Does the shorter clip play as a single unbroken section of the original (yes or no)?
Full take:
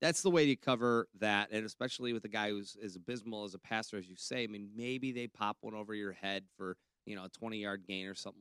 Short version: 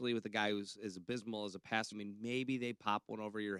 no